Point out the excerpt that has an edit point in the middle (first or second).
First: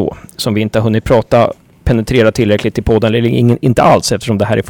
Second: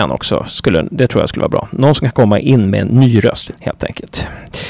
second